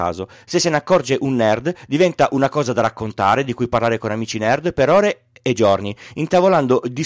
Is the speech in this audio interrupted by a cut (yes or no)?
no